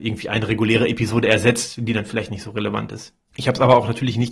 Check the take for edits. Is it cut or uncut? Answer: cut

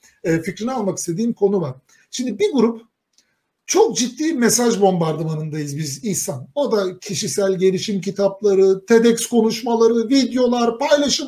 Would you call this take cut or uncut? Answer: uncut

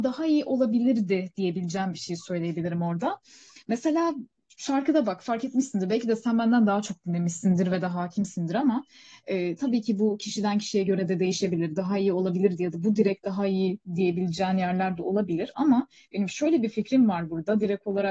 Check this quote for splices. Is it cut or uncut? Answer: uncut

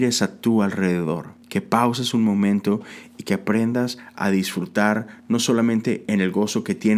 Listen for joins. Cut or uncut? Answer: cut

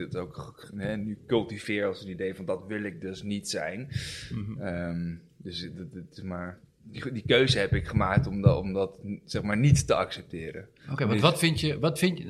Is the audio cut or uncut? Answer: uncut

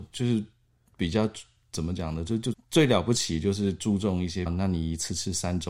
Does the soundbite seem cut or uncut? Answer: cut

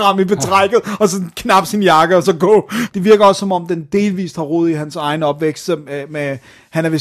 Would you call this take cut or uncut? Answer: cut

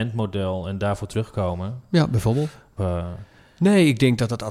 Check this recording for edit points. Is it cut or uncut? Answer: cut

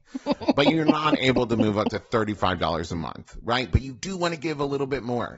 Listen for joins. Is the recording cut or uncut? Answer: uncut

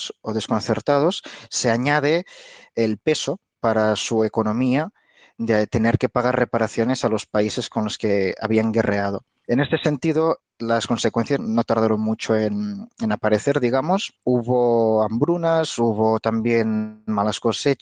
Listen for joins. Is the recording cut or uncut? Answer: cut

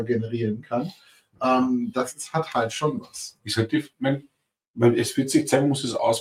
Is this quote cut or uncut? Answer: uncut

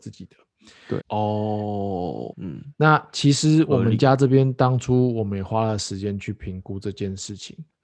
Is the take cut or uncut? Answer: cut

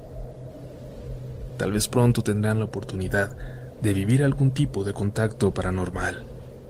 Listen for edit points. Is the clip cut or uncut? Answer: cut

